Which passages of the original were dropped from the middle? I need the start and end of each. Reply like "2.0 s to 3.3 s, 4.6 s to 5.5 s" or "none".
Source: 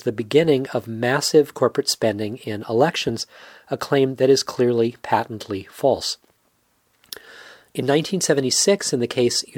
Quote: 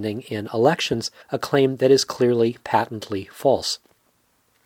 3.4 s to 3.6 s